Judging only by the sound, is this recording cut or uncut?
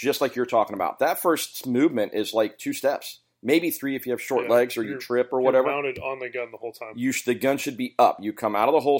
uncut